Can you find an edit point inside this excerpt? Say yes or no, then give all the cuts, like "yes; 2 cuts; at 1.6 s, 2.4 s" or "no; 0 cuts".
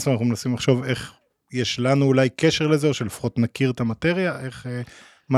no; 0 cuts